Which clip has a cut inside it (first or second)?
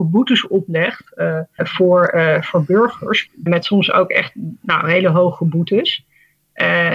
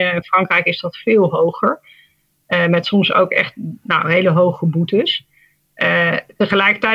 first